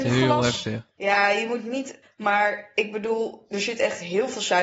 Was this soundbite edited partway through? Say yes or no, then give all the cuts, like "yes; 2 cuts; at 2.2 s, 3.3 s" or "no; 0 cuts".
yes; 2 cuts; at 0.9 s, 2.0 s